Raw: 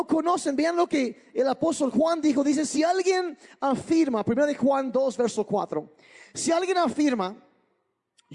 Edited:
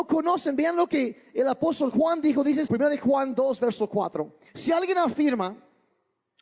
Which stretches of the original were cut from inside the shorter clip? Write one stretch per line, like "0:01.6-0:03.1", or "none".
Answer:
0:02.7-0:04.2
0:06.0-0:06.3